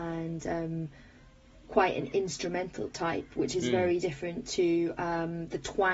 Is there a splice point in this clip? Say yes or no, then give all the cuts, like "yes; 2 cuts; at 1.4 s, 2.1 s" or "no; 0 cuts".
no; 0 cuts